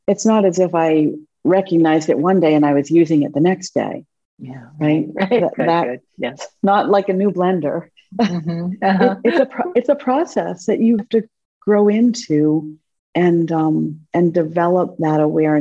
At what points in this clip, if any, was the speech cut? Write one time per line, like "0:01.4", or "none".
0:11.0